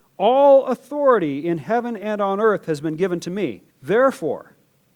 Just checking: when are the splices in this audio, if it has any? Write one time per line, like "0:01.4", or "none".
0:03.7